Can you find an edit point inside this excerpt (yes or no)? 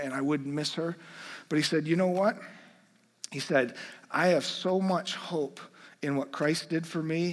no